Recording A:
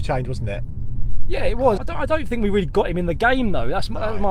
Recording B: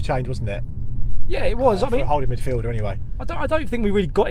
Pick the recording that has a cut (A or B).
A